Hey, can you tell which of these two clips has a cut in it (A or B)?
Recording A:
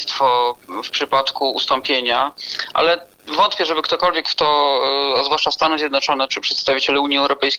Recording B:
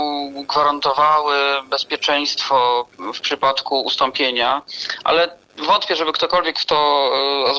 A